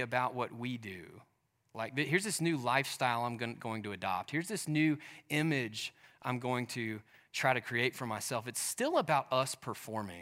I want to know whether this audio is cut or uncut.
uncut